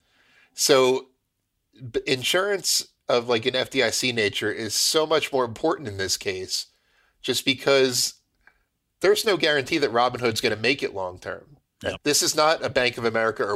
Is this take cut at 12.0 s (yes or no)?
yes